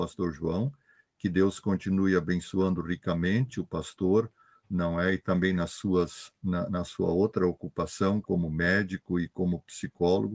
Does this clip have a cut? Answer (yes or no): no